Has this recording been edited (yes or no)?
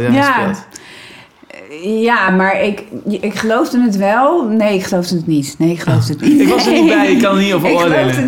no